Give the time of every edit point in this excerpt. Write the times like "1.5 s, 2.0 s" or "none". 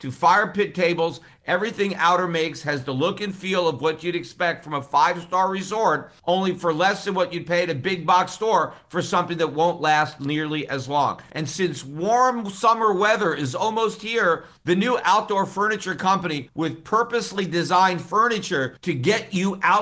11.3 s, 14.6 s